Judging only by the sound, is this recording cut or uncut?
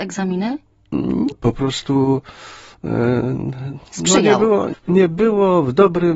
cut